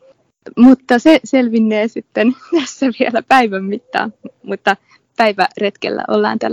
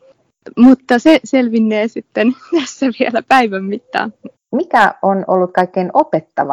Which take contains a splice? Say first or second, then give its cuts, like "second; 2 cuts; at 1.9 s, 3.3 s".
second; 1 cut; at 4.4 s